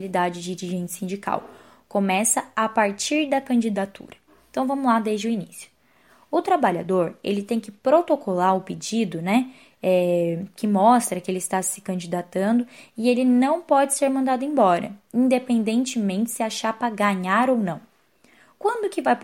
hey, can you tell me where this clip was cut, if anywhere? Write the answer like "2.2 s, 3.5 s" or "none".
none